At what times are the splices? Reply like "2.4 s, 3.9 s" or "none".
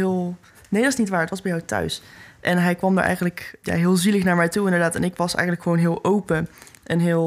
3.6 s